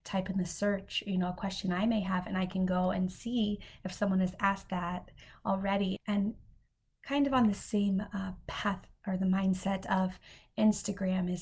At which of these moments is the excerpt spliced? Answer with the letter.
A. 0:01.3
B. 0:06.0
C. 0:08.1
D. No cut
B